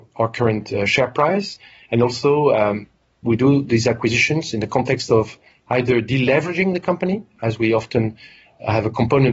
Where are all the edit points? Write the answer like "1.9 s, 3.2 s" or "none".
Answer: none